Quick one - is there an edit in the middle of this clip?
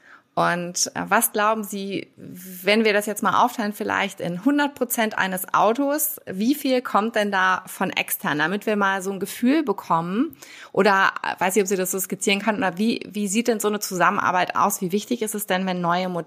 no; 0 cuts

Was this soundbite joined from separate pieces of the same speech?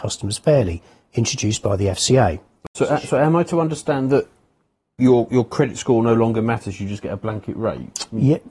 no; 0 cuts

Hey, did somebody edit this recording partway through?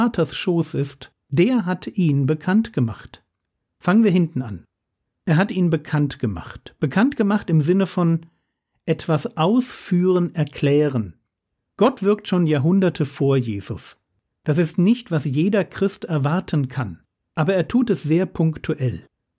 yes; 2 cuts; at 14.3 s, 17.2 s

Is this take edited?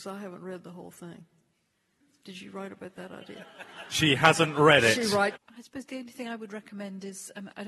yes; 1 cut; at 5.4 s

